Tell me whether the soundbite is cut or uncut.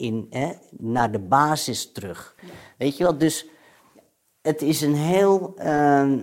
uncut